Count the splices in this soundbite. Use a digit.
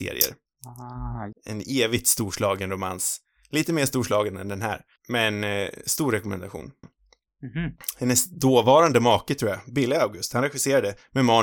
2